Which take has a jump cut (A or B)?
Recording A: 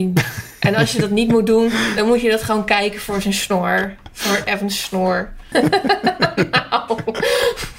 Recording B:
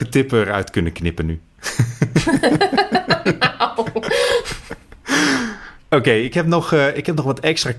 A